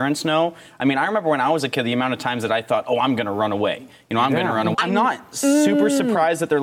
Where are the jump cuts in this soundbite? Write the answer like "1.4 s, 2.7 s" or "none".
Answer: 4.7 s